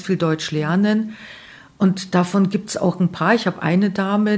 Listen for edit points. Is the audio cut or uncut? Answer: uncut